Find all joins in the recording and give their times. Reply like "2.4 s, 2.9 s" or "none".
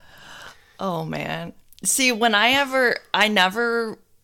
none